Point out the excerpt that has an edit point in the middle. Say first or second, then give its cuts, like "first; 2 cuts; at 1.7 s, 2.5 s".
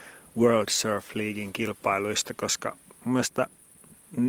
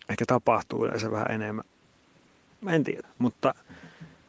second; 1 cut; at 3.0 s